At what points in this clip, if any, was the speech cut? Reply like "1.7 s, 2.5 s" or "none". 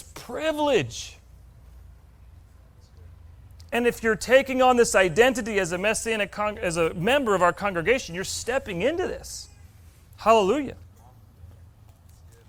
none